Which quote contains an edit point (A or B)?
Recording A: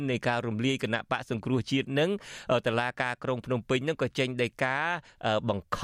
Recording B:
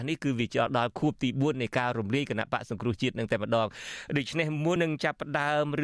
B